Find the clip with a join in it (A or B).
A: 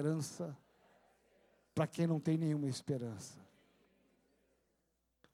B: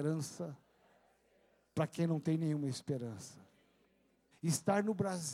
B